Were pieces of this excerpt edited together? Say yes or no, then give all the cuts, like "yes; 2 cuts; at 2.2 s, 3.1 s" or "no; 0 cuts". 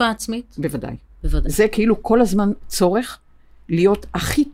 no; 0 cuts